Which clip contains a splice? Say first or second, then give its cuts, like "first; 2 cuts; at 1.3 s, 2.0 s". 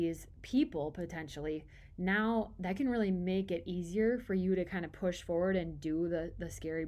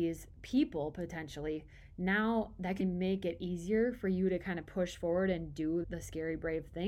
second; 2 cuts; at 2.8 s, 5.8 s